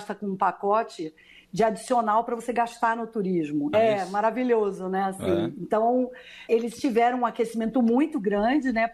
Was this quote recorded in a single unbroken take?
no; 2 cuts; at 3.7 s, 6.5 s

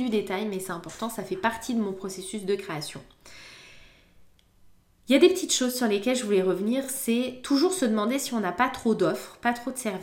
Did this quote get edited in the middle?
no; 0 cuts

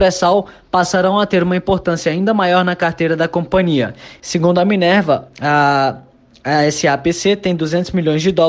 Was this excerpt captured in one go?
no; 1 cut; at 4.2 s

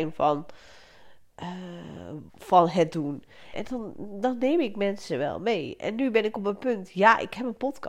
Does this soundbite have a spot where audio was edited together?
yes; 2 cuts; at 2.3 s, 3.5 s

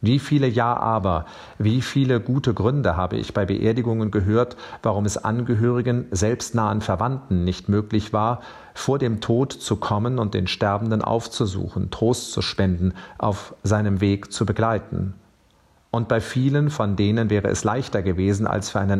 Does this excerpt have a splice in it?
no; 0 cuts

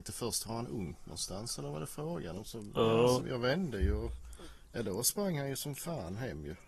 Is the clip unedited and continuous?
no; 1 cut; at 3.2 s

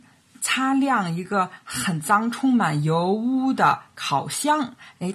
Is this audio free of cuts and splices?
yes; 0 cuts

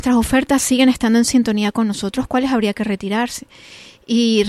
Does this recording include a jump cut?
no; 0 cuts

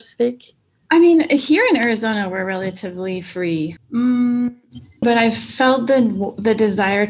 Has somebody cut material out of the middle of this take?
yes; 2 cuts; at 3.8 s, 5.0 s

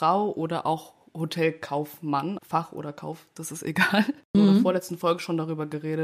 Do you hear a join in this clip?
yes; 2 cuts; at 2.4 s, 4.3 s

